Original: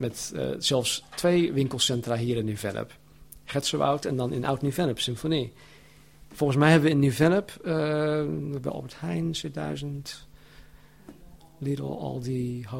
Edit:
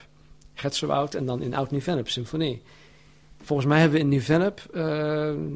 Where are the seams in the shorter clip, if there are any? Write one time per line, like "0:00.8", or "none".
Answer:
none